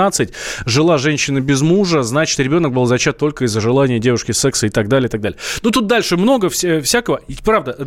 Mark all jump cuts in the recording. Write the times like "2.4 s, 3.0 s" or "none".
none